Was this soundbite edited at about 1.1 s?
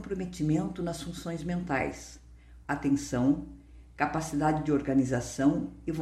no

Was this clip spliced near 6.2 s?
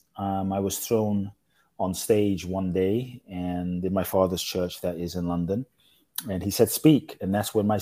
no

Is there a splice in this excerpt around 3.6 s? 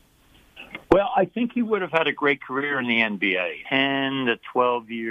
yes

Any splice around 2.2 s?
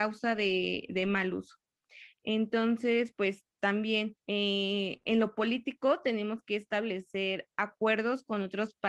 no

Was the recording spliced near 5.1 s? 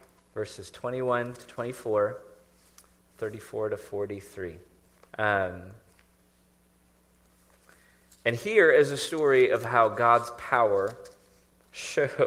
yes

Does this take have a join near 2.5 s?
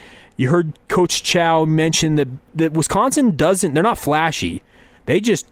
yes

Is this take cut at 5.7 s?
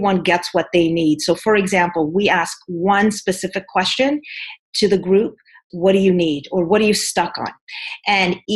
yes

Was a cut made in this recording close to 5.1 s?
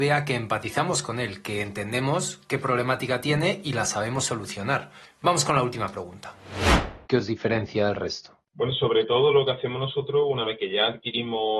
no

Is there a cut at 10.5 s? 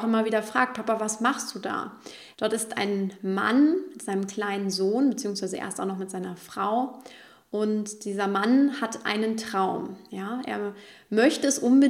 no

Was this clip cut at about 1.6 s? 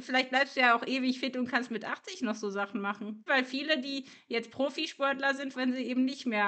no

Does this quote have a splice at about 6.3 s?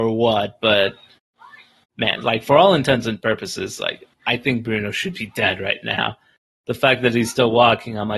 no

